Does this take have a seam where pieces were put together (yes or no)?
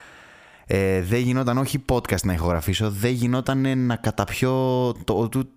no